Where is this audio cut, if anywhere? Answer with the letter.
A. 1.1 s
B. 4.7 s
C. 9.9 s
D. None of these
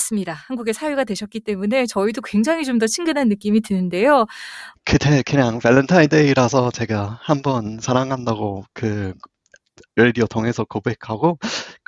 B